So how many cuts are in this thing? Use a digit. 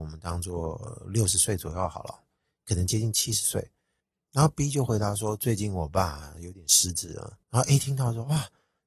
1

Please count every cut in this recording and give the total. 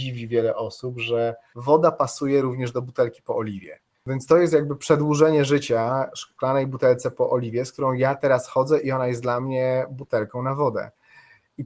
0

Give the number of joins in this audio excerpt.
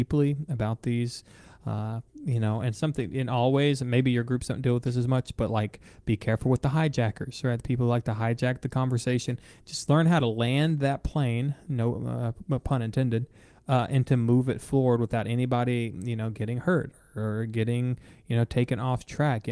0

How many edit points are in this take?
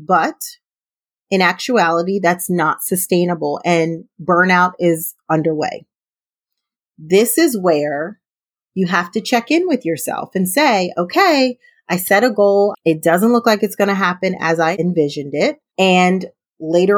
2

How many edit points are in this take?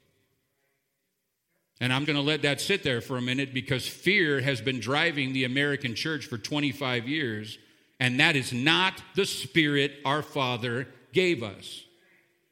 1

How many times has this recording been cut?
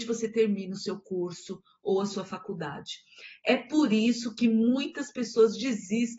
0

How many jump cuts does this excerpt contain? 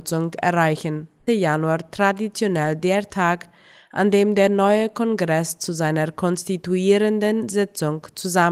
1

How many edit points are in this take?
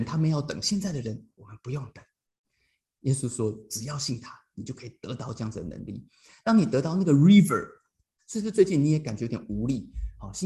1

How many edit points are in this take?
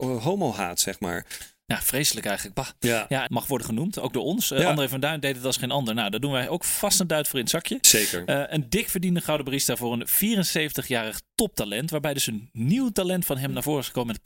1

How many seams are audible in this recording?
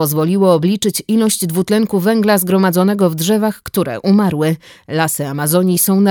1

